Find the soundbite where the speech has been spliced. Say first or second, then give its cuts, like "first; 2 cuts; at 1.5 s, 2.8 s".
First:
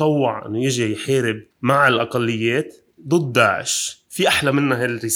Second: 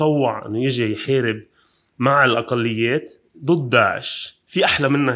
first; 1 cut; at 1.5 s